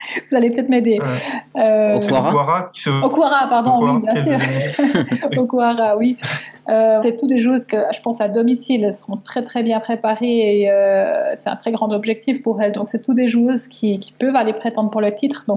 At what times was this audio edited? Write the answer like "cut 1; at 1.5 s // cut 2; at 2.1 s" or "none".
cut 1; at 7.0 s